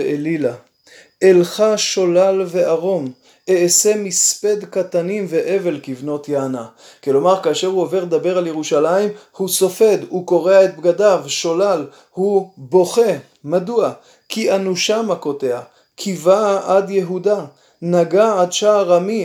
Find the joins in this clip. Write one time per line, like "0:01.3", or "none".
none